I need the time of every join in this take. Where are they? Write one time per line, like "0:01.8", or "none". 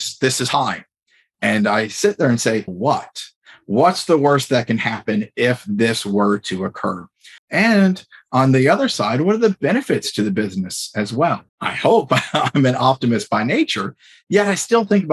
0:02.7
0:07.4
0:11.5